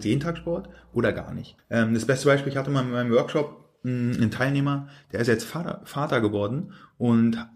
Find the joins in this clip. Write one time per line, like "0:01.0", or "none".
0:01.6